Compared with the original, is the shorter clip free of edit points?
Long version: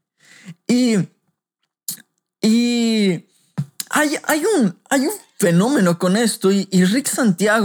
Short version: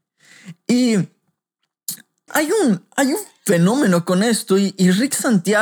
no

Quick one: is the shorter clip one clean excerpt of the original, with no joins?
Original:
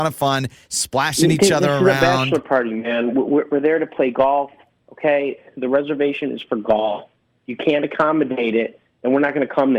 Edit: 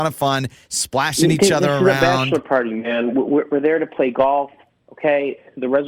yes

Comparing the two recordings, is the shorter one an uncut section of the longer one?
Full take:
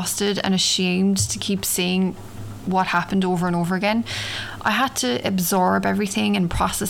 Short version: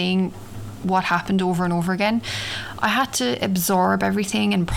yes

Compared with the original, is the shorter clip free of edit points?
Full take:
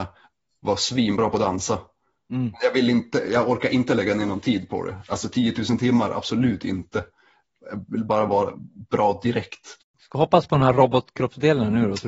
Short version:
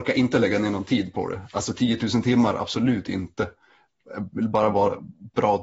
yes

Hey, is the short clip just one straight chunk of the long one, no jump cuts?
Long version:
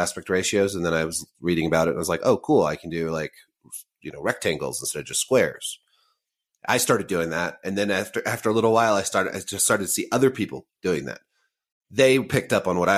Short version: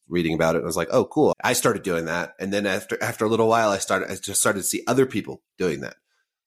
no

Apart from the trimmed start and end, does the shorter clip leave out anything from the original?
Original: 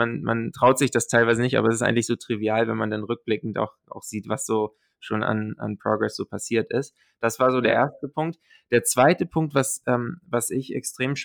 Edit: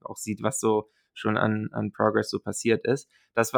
no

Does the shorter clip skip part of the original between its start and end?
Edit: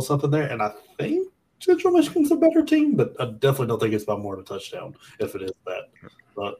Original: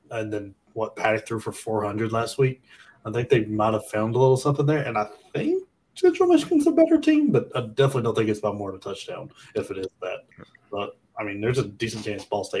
no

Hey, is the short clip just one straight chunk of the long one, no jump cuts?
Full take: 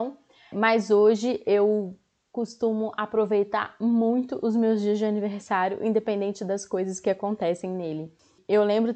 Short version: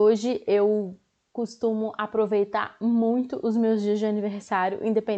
yes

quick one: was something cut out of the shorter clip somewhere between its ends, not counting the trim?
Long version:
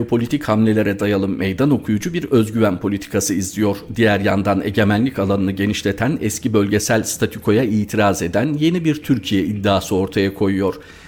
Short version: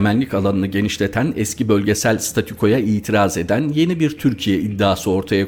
no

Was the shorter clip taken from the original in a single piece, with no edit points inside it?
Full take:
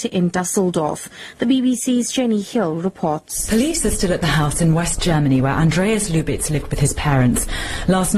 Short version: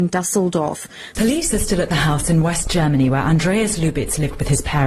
no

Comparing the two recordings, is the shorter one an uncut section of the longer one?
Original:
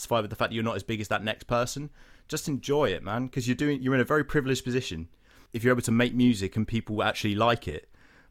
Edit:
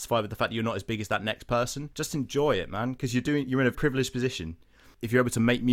no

